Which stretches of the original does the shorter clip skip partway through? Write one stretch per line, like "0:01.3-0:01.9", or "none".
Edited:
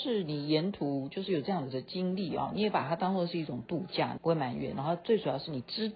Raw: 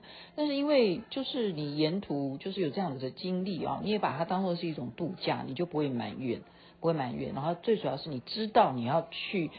0:05.5-0:06.8